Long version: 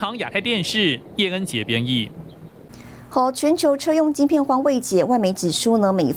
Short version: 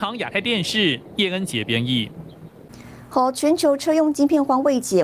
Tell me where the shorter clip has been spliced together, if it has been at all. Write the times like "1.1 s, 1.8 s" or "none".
none

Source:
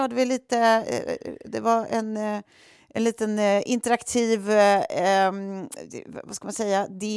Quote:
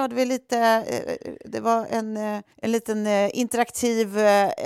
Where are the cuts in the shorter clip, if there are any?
2.5 s

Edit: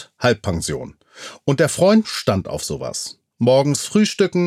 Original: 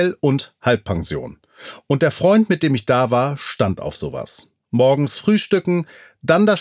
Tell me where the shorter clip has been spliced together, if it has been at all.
2.0 s

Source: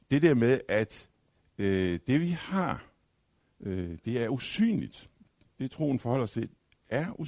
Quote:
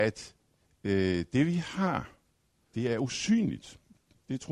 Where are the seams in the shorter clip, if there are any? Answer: 2.7 s

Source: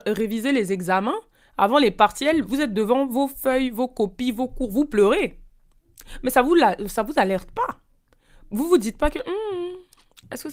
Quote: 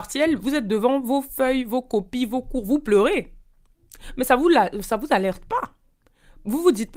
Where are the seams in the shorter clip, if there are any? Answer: none

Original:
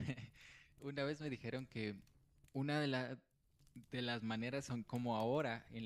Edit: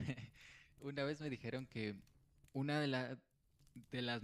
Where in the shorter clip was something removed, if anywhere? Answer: none

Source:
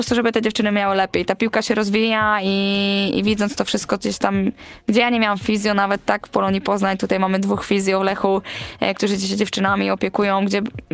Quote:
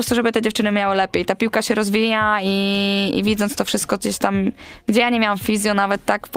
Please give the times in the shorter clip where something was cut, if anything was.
none

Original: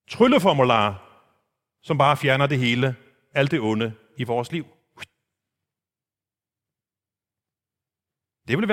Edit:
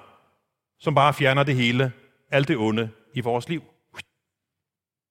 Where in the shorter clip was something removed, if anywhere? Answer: none

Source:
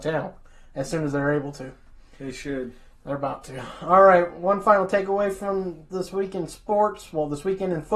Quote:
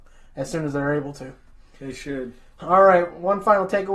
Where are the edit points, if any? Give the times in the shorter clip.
2.6 s

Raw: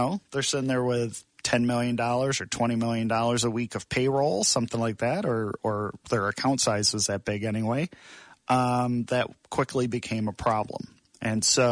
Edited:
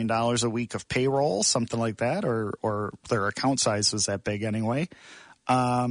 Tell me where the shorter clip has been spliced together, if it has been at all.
none

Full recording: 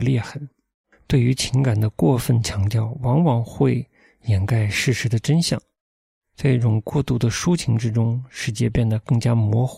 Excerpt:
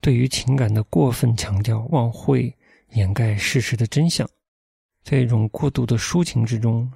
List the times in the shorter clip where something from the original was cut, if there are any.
1.9 s

